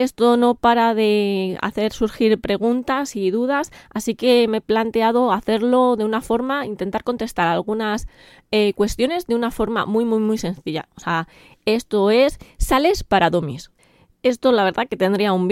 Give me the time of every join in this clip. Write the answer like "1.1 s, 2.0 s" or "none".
none